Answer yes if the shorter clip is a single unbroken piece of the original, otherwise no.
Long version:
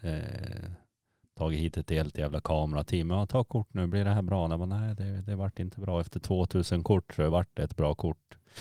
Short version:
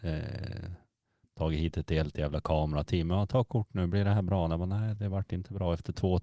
no